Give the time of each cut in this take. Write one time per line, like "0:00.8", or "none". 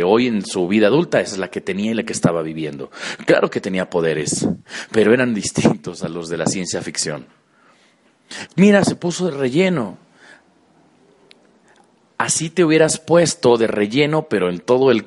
0:08.5